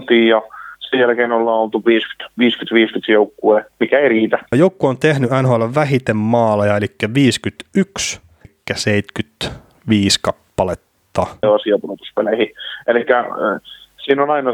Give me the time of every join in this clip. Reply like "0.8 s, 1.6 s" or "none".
4.5 s, 8.4 s, 11.4 s